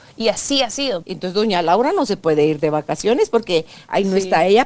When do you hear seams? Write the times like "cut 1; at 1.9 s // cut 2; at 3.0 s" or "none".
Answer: cut 1; at 1.0 s